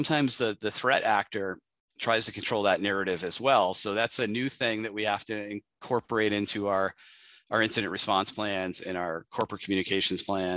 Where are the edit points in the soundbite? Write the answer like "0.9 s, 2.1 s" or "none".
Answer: none

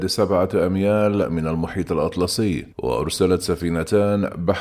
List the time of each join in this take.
2.7 s

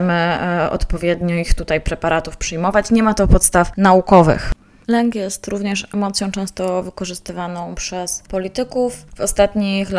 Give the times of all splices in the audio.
9.1 s

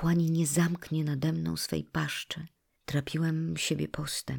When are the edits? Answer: 2.8 s

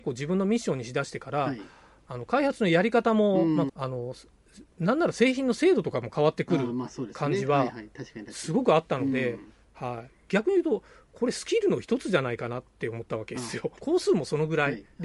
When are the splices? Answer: 3.7 s, 13.8 s

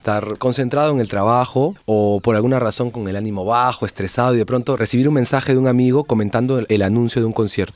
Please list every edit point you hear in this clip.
none

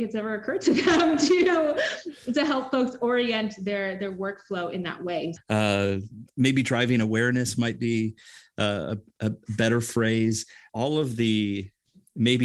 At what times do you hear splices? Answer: 5.4 s, 10.7 s

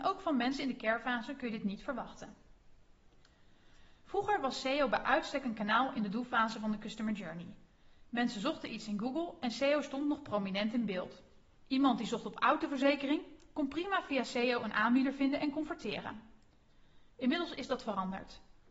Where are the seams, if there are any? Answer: 11.6 s

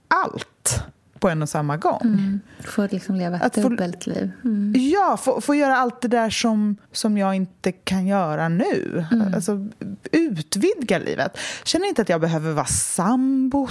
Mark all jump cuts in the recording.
6.8 s

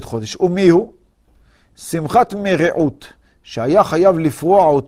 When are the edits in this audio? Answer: none

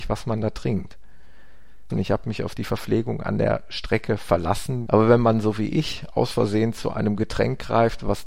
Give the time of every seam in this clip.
1.9 s, 4.9 s

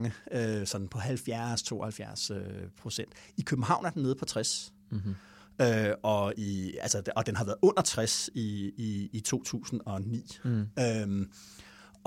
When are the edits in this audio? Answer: none

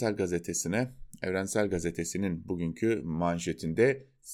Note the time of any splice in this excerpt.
none

